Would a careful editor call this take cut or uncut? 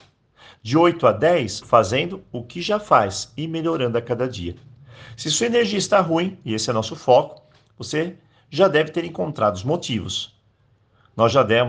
cut